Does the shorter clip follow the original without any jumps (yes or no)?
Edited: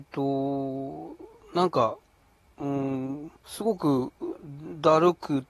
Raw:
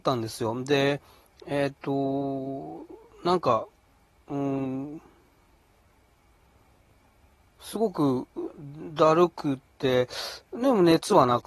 no